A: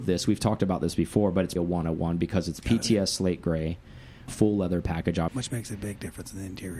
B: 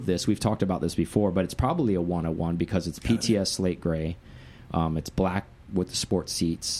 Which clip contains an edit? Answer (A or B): A